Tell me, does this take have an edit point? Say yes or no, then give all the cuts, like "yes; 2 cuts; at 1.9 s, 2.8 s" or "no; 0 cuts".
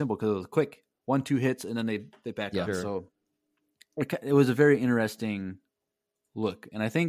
yes; 1 cut; at 2.7 s